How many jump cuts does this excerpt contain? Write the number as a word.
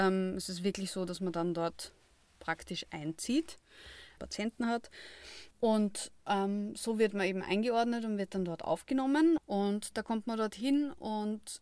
three